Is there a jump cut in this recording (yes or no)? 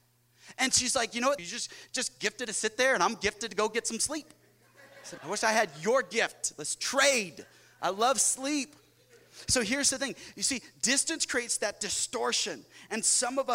yes